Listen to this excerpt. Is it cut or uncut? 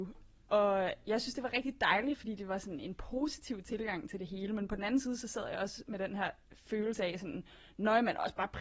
uncut